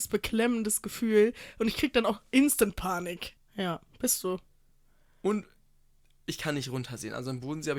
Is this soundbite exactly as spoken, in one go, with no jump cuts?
no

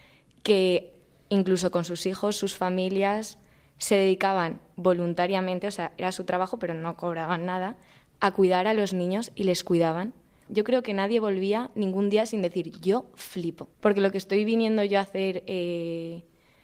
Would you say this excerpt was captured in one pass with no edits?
no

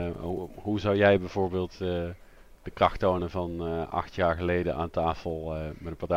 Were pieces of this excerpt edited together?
no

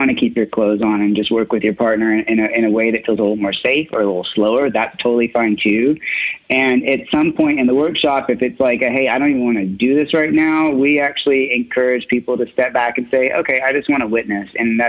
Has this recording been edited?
no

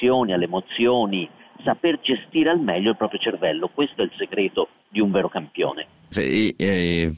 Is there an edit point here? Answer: yes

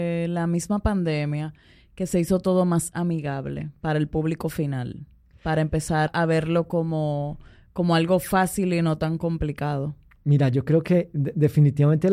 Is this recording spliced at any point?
yes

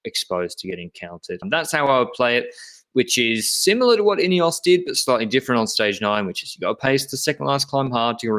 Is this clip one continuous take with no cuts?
no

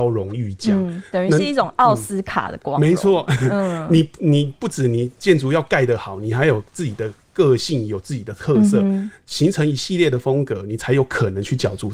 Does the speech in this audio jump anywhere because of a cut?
no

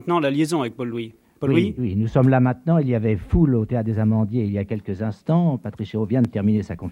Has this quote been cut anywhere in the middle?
yes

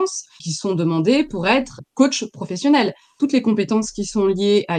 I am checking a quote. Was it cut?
no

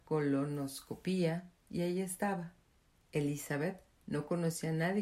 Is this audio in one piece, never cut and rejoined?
no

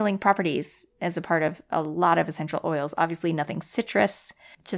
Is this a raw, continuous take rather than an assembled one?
yes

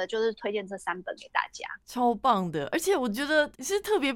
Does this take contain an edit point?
no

